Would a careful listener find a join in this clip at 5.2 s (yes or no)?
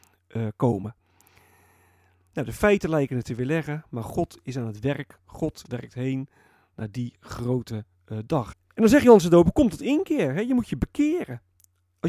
no